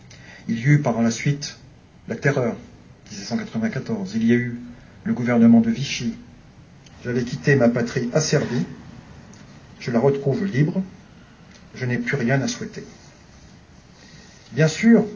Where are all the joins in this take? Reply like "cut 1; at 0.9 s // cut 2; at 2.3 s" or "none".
cut 1; at 6.9 s